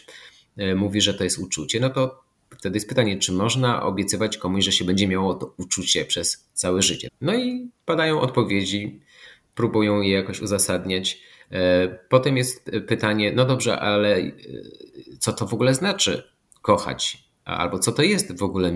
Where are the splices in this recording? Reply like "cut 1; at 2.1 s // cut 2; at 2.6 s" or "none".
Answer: cut 1; at 7.1 s